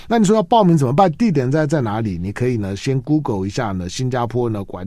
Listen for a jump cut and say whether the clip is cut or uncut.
uncut